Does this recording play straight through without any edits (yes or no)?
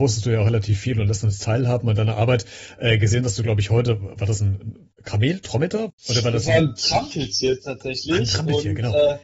no